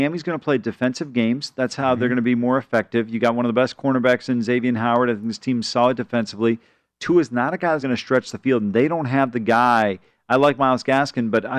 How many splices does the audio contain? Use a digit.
1